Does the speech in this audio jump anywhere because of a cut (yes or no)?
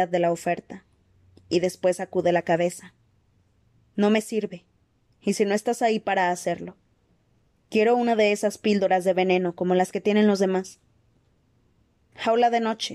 no